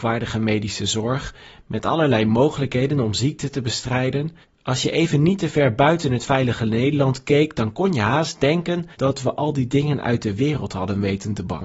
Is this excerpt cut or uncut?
cut